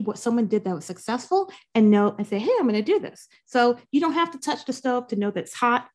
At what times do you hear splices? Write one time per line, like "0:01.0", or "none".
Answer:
none